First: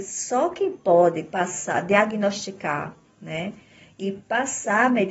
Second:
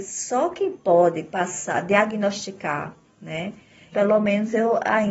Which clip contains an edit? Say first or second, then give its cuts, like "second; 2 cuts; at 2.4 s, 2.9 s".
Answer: second; 1 cut; at 3.9 s